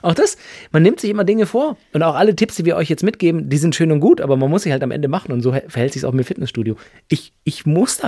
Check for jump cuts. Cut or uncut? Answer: uncut